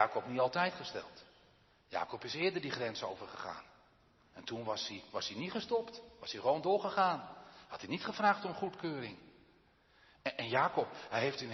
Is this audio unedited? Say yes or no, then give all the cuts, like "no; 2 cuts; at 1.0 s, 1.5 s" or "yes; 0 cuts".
yes; 0 cuts